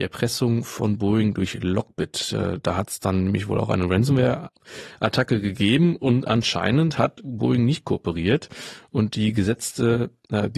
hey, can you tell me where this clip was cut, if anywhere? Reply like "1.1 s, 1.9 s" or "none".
none